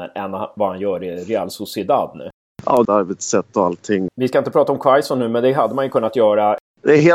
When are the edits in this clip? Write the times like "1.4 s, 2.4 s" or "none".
2.9 s, 4.1 s